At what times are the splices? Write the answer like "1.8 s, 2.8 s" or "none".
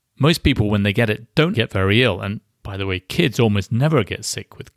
1.5 s